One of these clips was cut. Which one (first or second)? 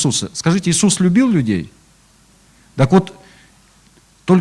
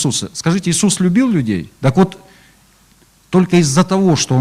second